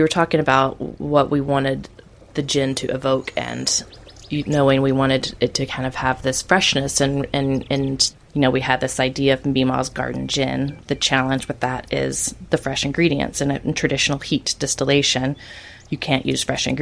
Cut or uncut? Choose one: uncut